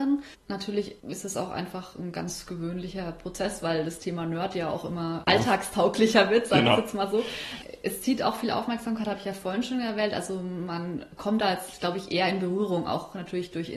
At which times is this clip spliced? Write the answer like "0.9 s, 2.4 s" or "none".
none